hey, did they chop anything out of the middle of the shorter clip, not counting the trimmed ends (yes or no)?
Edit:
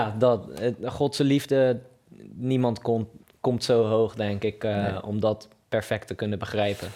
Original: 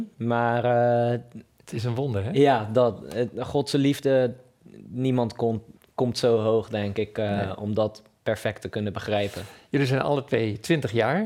no